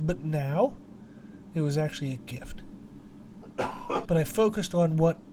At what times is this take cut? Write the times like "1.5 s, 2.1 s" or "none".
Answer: 1.5 s, 4.0 s